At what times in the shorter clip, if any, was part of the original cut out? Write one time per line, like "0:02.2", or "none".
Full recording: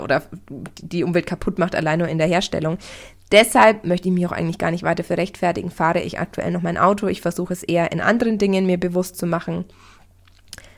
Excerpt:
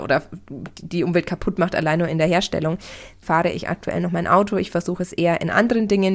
0:03.2